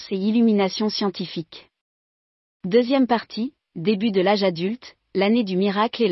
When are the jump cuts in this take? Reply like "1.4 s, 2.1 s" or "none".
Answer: none